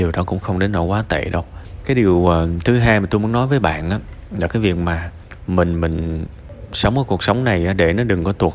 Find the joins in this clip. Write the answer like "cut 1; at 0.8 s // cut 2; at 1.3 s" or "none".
none